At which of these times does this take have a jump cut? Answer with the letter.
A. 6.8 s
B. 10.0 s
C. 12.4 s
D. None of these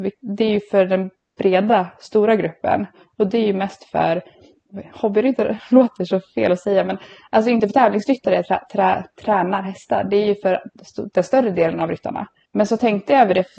C